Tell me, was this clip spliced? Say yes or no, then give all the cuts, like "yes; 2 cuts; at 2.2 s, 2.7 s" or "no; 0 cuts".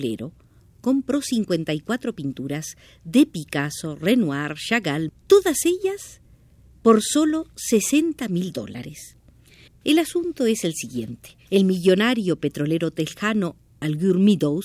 yes; 3 cuts; at 5.1 s, 9.7 s, 11.5 s